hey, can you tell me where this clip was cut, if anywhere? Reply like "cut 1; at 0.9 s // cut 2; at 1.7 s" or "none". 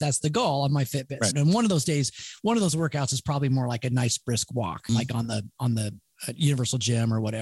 cut 1; at 1.3 s // cut 2; at 4.9 s